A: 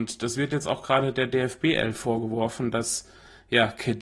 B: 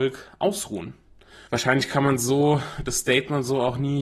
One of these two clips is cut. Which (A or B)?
B